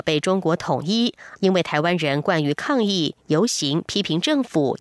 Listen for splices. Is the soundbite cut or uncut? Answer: cut